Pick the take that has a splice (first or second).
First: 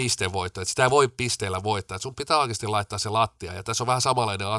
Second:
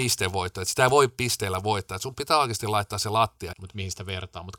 second